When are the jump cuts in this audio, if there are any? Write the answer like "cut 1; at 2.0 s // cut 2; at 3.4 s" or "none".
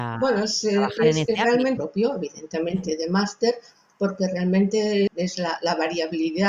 cut 1; at 1.8 s // cut 2; at 5.1 s